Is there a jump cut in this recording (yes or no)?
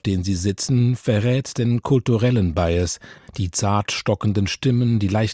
yes